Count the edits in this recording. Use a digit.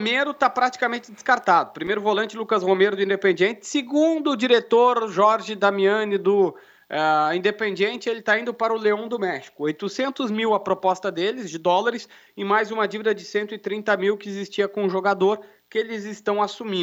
0